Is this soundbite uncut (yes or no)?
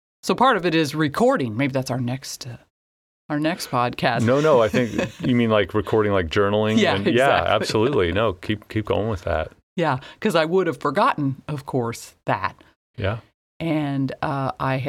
no